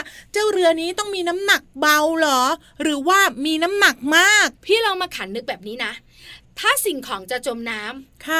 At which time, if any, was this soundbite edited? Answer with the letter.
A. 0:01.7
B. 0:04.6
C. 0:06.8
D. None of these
B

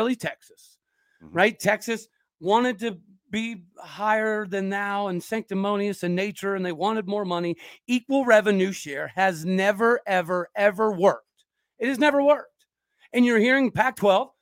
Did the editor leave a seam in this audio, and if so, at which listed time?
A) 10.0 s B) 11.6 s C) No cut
C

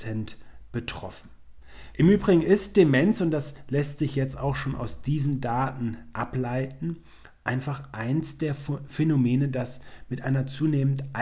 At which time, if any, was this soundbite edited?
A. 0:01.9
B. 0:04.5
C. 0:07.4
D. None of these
A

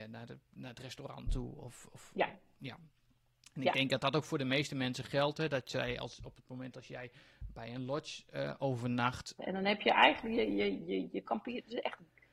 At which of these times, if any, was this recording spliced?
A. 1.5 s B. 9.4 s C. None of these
B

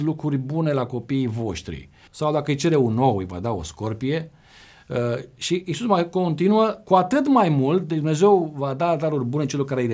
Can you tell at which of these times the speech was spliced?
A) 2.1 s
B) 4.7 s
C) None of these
A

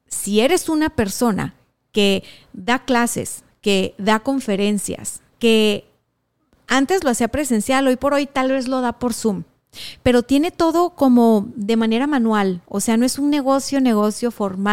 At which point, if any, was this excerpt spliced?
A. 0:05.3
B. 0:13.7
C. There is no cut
A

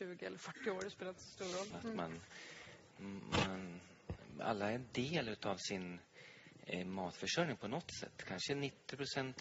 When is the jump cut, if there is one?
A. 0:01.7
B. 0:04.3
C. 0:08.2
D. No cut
A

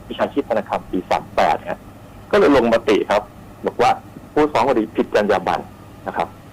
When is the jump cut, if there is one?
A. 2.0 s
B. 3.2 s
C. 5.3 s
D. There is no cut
D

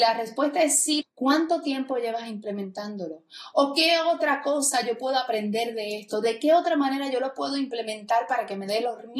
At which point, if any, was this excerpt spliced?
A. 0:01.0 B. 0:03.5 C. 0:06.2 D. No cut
A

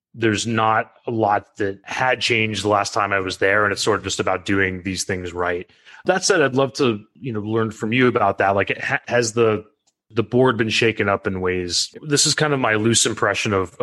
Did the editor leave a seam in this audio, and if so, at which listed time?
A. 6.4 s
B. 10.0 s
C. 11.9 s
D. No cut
C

